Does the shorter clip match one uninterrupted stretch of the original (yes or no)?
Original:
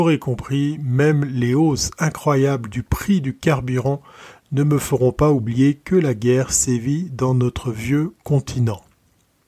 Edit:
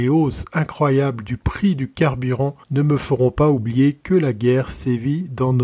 no